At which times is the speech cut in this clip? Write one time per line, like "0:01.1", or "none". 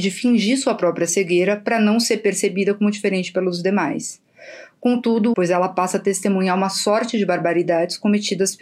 0:05.3